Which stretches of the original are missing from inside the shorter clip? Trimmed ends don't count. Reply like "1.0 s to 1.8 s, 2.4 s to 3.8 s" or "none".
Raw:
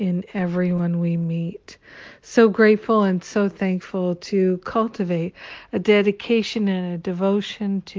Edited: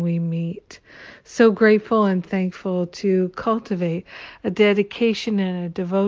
3.2 s to 3.5 s